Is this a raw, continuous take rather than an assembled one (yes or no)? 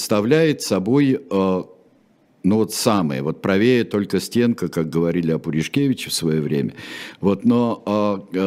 yes